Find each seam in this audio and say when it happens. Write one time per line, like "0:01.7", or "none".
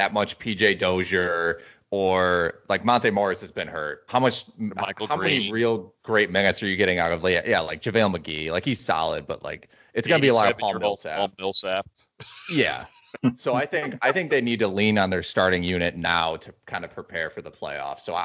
0:04.1